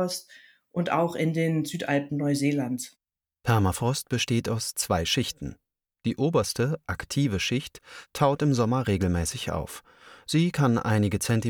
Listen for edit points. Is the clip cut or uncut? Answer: uncut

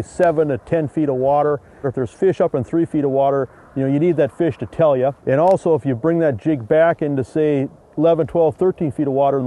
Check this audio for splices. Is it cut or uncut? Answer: cut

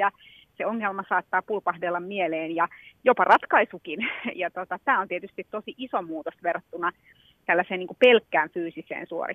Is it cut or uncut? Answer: uncut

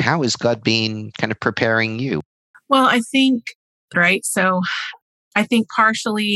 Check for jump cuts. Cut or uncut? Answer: cut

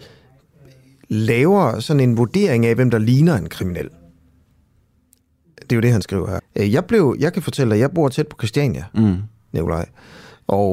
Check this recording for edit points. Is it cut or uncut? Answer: cut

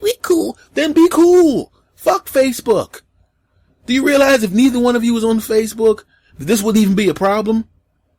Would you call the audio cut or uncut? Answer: uncut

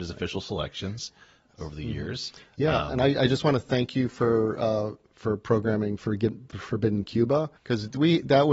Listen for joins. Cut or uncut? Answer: cut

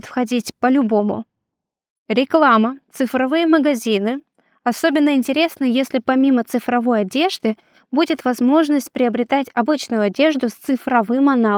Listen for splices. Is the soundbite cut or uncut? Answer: uncut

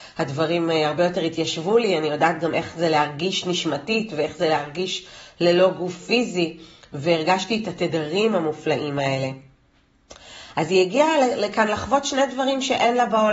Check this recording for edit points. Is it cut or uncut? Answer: uncut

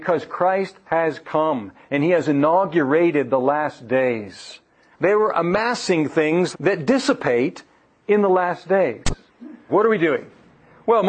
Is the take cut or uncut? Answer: cut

